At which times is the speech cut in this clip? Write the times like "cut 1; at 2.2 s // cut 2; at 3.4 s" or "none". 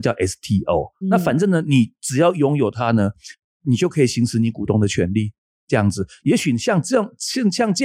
cut 1; at 1.0 s